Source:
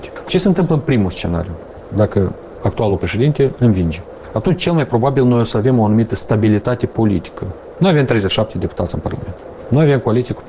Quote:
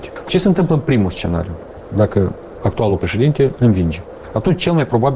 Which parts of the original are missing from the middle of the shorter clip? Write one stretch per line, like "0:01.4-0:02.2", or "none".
none